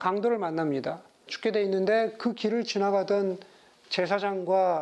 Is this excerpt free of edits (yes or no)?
no